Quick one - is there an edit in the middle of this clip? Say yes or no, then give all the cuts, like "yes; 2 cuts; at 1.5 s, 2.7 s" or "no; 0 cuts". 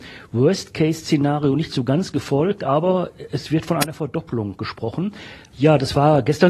yes; 1 cut; at 5.5 s